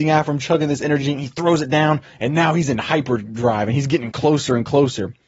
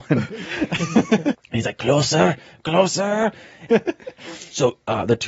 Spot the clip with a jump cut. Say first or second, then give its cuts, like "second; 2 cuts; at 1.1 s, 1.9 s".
second; 2 cuts; at 1.3 s, 3.7 s